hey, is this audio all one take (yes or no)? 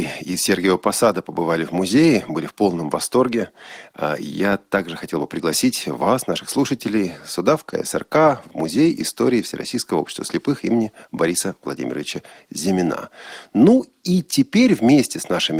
yes